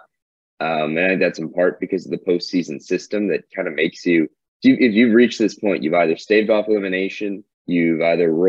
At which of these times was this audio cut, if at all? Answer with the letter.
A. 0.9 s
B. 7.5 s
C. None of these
B